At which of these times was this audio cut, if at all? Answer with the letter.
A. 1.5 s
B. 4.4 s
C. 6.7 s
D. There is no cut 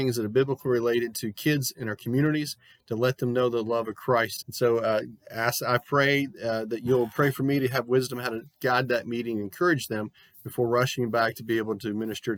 B